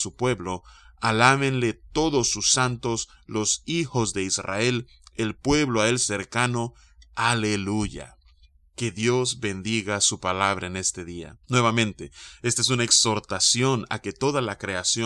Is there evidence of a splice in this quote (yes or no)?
yes